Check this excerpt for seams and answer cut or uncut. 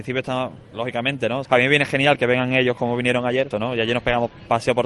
cut